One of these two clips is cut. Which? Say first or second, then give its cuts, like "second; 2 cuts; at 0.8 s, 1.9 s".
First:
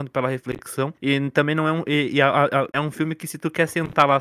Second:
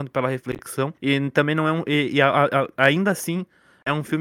first; 1 cut; at 2.7 s